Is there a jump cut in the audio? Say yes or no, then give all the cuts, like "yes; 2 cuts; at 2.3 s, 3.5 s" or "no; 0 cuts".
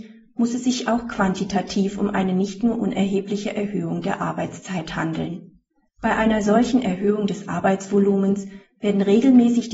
yes; 1 cut; at 5.9 s